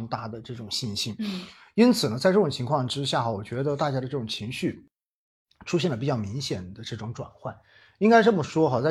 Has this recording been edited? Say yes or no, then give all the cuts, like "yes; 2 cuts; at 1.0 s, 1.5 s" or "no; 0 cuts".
no; 0 cuts